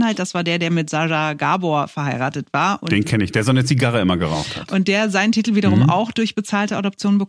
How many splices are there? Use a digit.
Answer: 0